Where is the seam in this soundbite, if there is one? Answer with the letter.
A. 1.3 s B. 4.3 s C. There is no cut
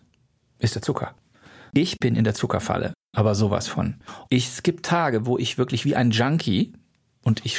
B